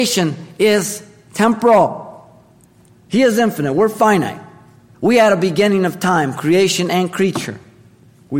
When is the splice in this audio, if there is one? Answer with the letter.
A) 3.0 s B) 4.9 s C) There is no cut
B